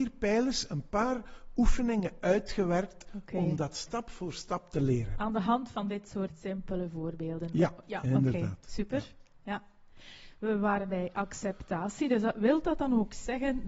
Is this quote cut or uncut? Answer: uncut